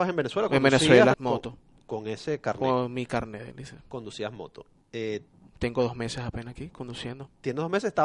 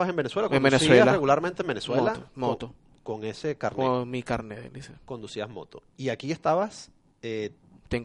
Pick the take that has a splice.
first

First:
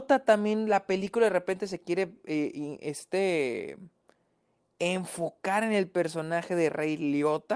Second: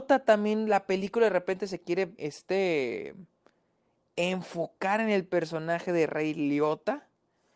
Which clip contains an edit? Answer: second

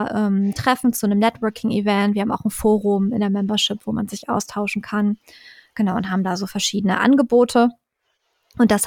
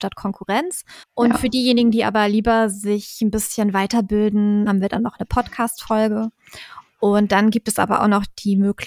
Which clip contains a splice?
second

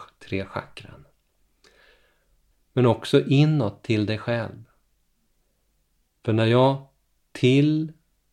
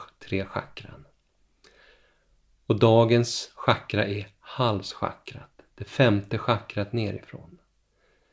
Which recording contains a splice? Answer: first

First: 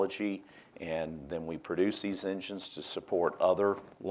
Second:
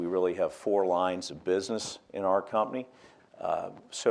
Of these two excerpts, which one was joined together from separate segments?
second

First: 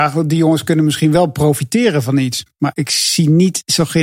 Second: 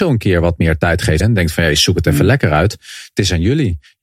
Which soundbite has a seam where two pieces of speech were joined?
second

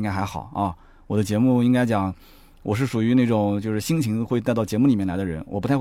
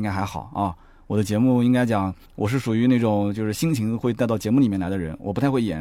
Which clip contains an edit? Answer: second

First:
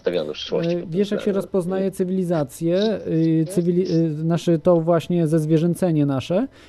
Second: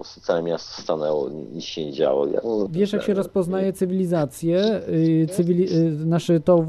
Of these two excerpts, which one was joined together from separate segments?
second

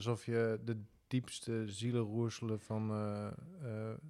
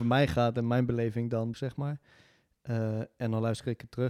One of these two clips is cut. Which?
second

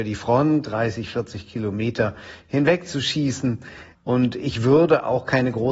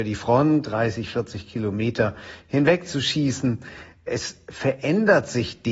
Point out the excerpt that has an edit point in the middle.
first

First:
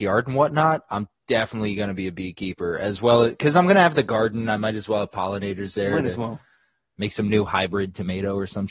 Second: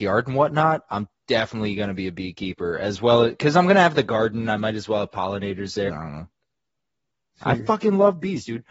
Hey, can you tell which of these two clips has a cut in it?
second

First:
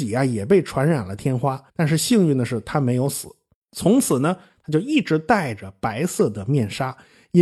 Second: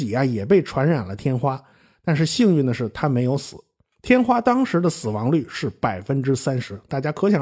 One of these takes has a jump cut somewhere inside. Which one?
first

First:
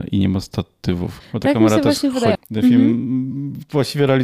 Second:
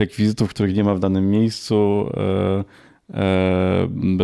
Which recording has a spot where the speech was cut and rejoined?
first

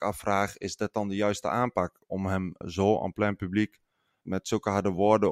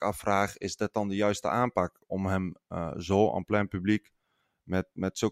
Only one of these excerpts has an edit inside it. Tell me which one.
first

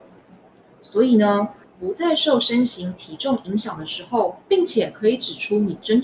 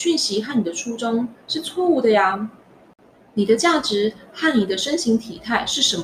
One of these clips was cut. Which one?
first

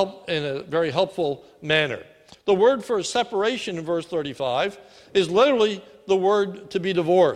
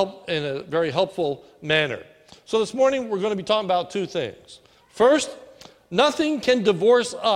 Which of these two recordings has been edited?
first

